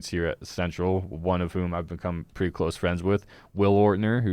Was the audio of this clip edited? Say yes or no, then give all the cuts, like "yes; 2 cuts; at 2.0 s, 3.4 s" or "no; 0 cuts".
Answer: no; 0 cuts